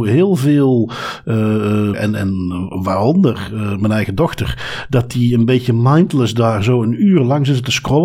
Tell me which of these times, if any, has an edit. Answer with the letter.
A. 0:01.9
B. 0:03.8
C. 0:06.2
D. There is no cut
A